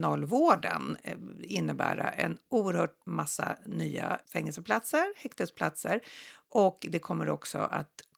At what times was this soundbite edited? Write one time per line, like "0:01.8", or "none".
0:04.2